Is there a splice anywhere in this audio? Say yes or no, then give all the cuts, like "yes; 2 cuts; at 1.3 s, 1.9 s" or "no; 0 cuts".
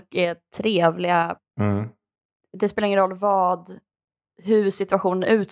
no; 0 cuts